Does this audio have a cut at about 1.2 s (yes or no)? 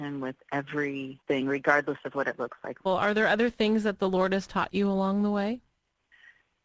yes